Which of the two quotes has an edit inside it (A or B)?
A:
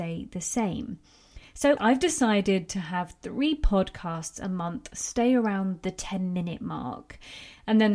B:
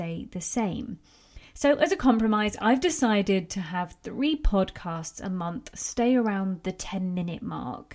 A